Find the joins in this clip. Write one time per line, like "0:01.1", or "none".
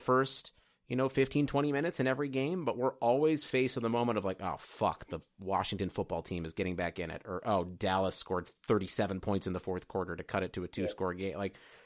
none